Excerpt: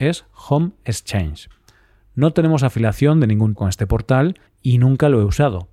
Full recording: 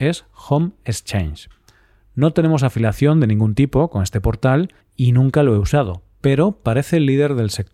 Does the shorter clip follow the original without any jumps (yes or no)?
no